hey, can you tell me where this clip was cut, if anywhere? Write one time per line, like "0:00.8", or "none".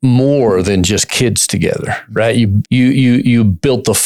0:02.6